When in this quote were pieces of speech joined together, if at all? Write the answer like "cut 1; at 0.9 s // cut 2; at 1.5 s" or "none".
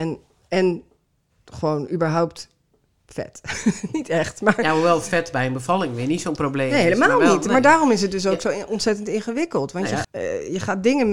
cut 1; at 10.0 s